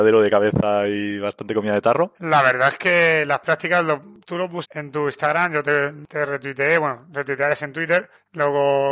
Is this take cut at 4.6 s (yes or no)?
yes